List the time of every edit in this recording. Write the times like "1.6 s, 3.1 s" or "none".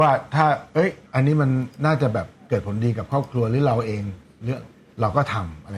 none